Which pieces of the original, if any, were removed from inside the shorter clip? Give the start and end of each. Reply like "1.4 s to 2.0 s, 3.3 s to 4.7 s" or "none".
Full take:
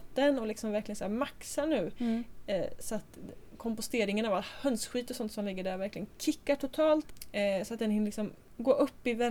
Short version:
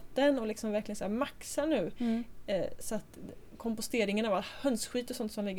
none